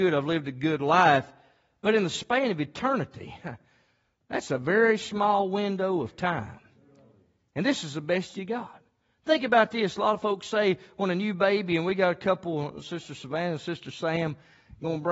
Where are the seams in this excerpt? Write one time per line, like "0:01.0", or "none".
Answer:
none